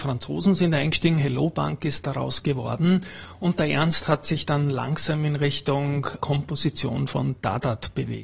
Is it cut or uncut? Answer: cut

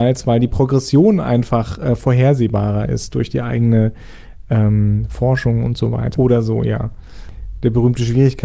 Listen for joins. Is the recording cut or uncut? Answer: cut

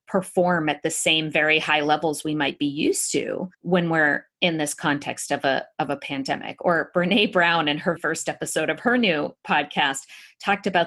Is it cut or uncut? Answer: cut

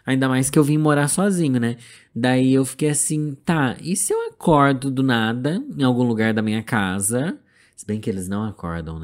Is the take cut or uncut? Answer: uncut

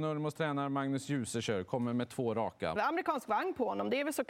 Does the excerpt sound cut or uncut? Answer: cut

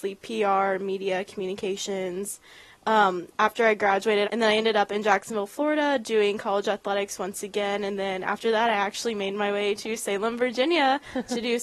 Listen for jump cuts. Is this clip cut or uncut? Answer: cut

